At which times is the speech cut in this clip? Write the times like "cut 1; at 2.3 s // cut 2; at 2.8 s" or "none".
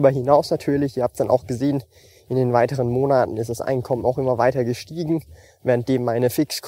none